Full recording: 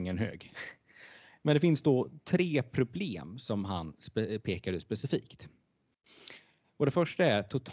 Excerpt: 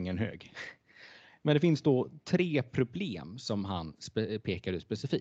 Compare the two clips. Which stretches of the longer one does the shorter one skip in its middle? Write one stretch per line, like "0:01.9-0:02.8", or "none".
none